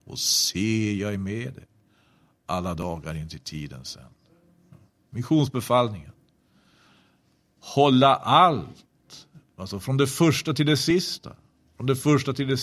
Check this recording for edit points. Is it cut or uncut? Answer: uncut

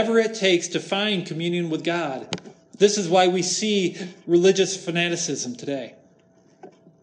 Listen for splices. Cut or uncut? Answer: uncut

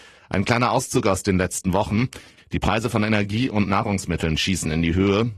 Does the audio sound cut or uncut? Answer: cut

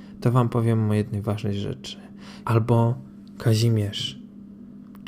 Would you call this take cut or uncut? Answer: cut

